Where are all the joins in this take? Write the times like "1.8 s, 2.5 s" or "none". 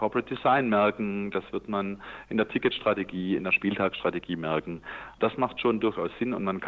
none